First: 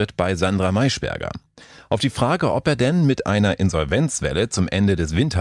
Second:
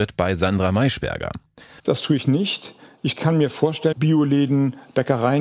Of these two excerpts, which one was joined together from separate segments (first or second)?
second